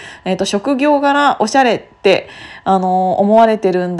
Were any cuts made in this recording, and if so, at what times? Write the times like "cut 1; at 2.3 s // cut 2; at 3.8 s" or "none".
none